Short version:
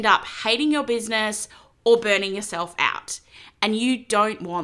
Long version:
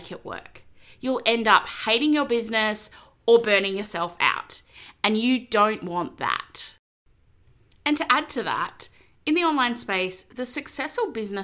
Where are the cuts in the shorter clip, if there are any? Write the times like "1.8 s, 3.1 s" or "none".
none